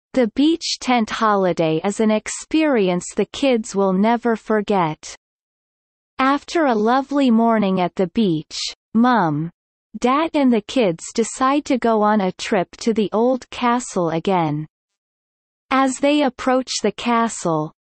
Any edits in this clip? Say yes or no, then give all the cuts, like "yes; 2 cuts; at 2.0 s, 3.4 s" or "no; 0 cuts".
no; 0 cuts